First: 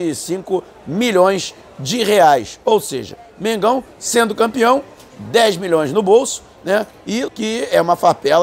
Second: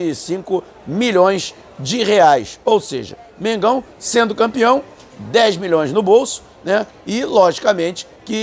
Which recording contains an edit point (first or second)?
first